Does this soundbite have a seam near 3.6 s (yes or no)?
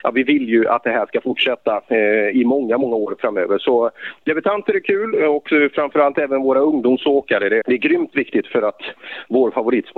no